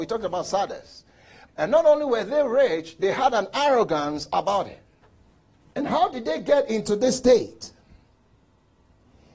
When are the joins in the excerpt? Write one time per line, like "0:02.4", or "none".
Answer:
0:01.5
0:05.6